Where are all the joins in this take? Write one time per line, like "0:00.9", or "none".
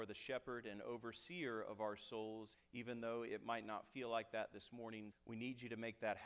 0:02.5
0:05.1